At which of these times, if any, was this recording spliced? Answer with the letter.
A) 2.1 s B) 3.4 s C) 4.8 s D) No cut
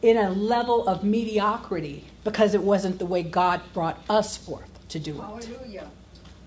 A